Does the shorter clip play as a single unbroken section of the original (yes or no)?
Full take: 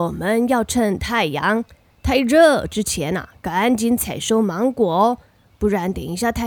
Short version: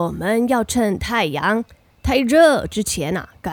yes